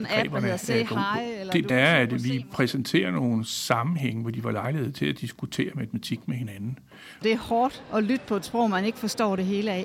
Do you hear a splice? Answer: yes; 2 cuts; at 1.7 s, 7.2 s

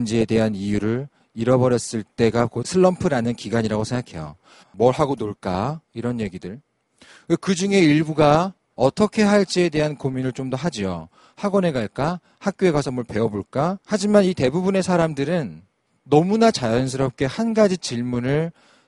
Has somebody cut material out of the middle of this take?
yes; 2 cuts; at 4.6 s, 13.8 s

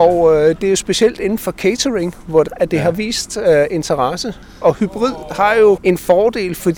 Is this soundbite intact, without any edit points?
no; 2 cuts; at 2.5 s, 5.8 s

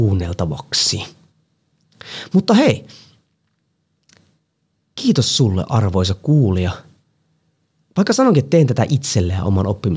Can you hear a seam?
no; 0 cuts

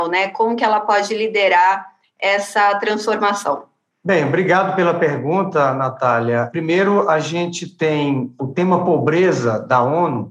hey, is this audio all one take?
yes; 0 cuts

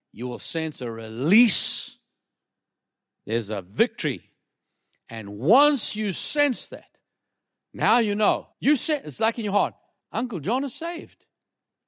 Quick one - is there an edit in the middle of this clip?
yes; 2 cuts; at 8.5 s, 10.0 s

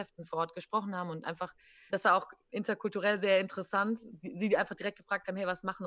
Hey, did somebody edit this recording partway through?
yes; 1 cut; at 1.9 s

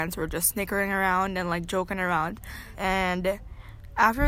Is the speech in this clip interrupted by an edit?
yes; 1 cut; at 2.7 s

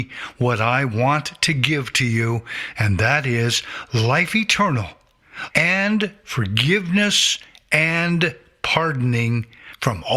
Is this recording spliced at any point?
yes; 1 cut; at 5.5 s

